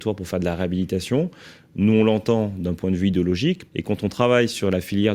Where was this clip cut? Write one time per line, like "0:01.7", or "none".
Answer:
0:03.7